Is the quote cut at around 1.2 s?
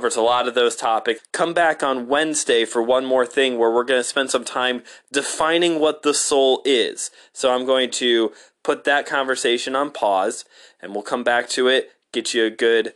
yes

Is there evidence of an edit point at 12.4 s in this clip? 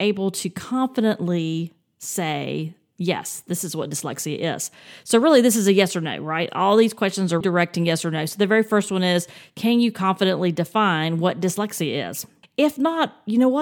yes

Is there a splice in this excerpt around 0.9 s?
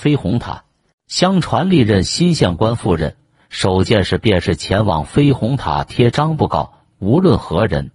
yes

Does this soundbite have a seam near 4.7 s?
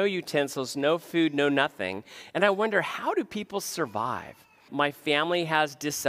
yes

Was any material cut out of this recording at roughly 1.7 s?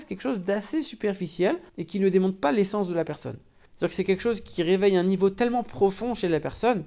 yes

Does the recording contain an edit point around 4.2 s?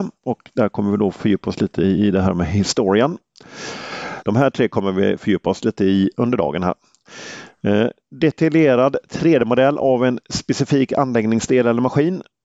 yes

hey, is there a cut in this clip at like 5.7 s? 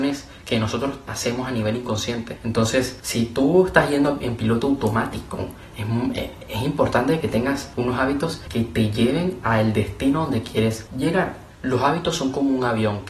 no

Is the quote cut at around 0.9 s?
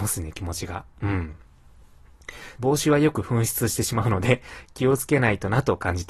no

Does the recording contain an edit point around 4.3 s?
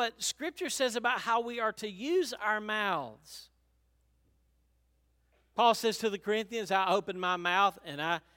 no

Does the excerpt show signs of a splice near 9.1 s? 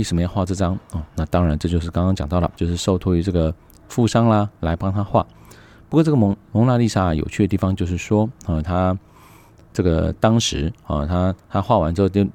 no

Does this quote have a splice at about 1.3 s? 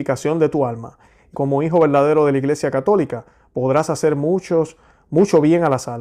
yes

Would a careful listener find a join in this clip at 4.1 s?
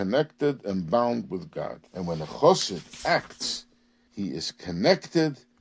yes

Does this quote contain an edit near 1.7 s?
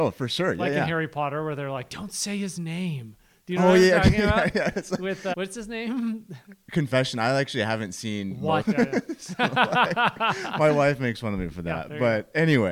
no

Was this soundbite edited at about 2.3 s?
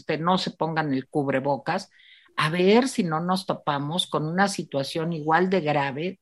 no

